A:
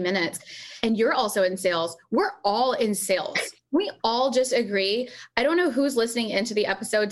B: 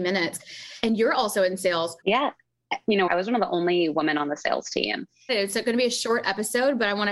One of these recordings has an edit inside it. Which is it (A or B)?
B